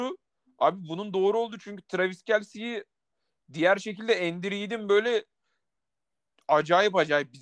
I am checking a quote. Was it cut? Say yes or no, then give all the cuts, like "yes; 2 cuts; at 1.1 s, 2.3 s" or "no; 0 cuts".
no; 0 cuts